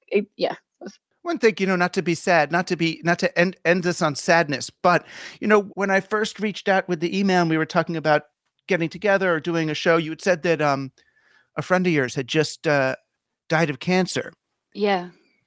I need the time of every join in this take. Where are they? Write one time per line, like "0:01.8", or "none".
0:05.7

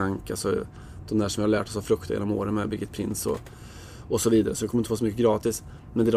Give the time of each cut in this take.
none

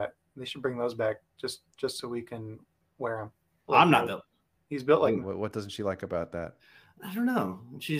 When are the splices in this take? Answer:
0:03.7
0:05.2

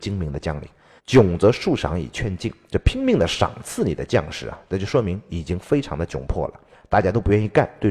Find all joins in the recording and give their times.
0:01.0

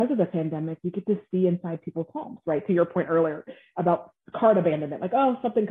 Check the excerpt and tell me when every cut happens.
none

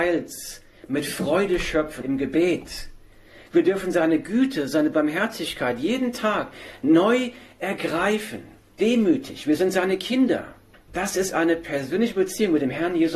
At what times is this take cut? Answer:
0:02.0
0:10.7

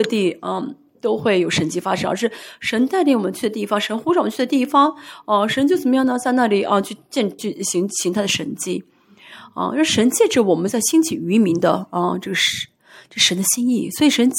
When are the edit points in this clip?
0:07.4

